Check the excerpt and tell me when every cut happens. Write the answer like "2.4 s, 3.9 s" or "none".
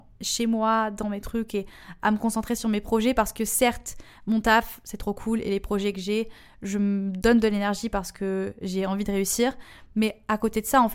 none